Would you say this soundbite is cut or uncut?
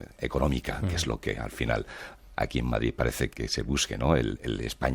cut